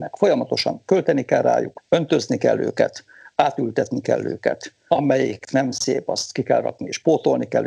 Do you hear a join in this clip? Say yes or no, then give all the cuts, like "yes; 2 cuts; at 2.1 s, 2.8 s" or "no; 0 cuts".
no; 0 cuts